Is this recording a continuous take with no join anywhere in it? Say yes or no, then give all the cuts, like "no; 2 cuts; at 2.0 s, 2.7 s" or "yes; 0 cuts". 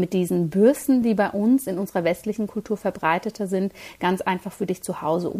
yes; 0 cuts